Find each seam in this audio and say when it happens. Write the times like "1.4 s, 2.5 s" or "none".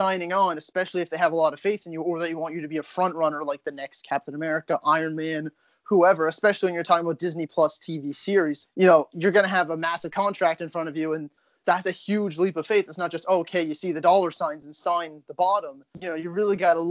8.6 s, 11.6 s